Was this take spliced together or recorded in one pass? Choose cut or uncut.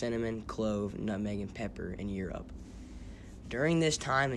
cut